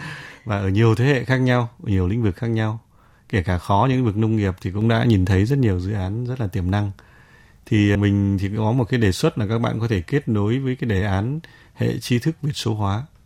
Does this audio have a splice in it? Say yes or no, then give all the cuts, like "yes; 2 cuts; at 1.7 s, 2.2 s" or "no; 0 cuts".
yes; 1 cut; at 8.0 s